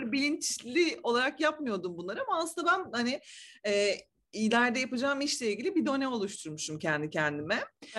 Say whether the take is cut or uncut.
uncut